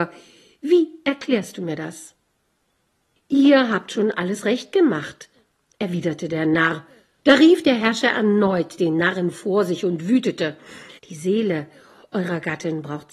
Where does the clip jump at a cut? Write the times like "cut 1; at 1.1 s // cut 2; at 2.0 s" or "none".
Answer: cut 1; at 3.2 s // cut 2; at 7.2 s // cut 3; at 11.0 s